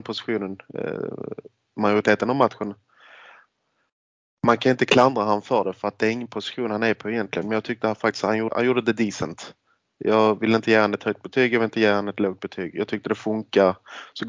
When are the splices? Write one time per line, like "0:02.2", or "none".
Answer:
0:08.5